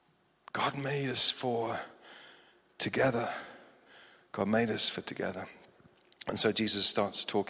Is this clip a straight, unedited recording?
yes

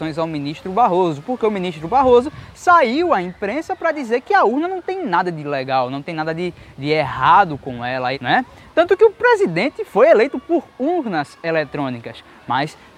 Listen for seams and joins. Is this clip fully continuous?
no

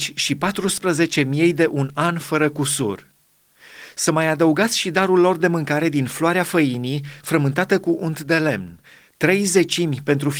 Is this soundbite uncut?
yes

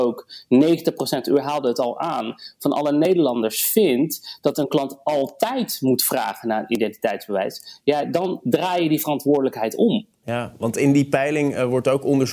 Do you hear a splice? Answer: no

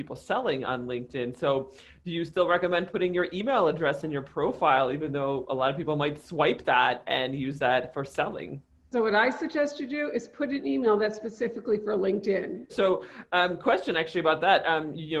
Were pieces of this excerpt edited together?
yes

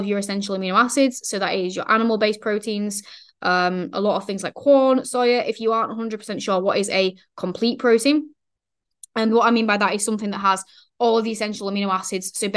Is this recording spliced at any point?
no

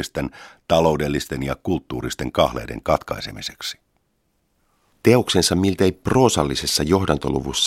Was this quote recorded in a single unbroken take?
yes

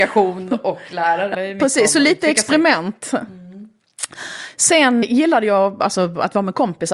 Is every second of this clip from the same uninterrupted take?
no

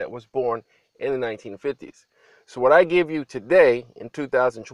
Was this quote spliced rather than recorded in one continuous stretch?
no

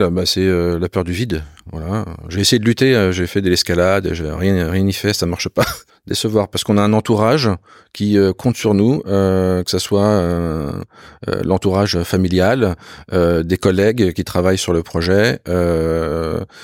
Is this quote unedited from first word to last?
no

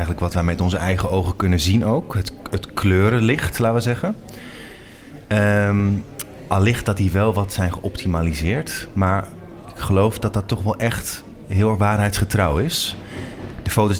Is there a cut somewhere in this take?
no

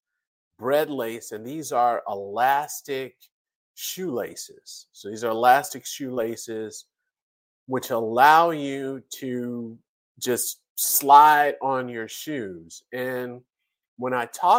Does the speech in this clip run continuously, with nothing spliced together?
yes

